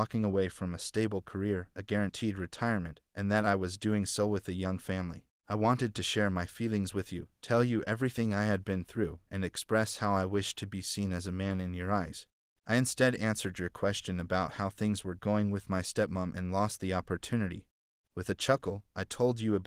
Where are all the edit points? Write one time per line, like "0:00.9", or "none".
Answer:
0:05.4